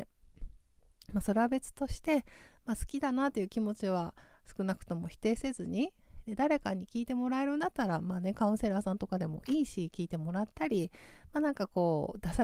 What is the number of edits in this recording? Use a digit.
0